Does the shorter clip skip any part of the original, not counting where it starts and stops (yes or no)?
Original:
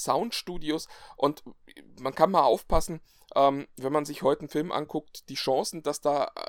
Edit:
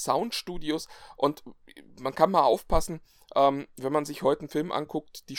no